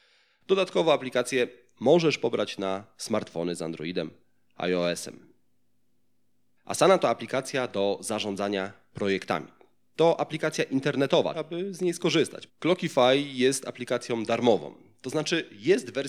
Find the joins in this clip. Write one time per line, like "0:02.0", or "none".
0:06.6
0:11.3
0:12.5